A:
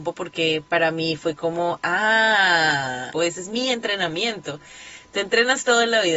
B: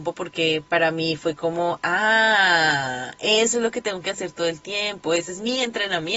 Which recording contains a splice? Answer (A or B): A